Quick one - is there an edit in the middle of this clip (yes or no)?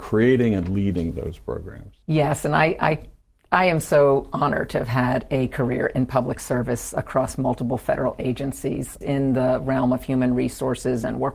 yes